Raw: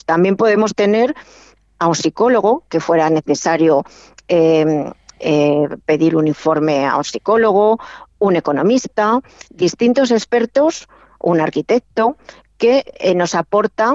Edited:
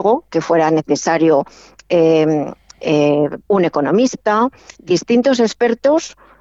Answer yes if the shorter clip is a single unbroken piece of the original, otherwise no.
no